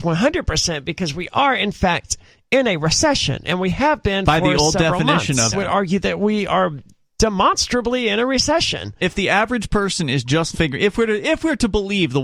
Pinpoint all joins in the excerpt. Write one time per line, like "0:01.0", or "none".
0:05.5
0:10.5